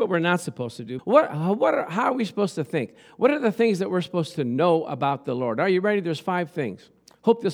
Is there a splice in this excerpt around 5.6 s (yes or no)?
no